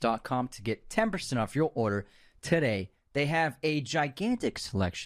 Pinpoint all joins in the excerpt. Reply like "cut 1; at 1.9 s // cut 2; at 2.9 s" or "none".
none